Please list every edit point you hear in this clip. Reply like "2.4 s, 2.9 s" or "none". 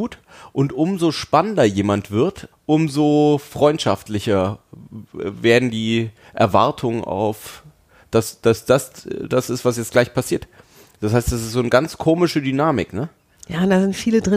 2.5 s